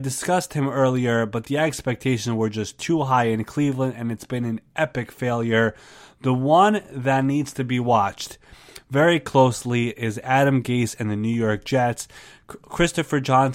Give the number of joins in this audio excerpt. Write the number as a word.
zero